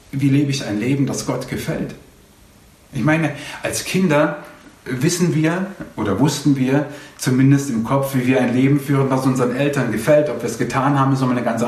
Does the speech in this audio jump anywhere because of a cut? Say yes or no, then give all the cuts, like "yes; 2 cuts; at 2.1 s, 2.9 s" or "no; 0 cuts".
no; 0 cuts